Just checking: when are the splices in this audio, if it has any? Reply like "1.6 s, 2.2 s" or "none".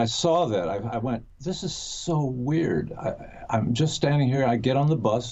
none